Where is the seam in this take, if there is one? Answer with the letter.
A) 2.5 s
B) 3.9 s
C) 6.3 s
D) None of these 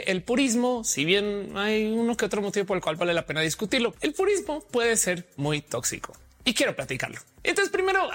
B